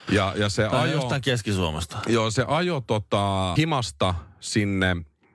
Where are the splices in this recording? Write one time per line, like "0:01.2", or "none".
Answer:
0:03.6